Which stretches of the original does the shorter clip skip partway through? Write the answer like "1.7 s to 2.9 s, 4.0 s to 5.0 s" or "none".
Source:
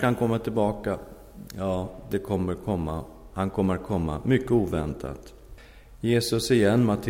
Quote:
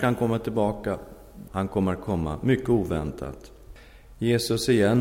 1.5 s to 3.3 s